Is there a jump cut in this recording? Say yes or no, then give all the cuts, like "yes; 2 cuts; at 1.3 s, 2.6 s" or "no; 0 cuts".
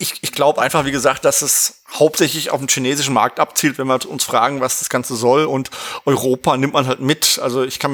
no; 0 cuts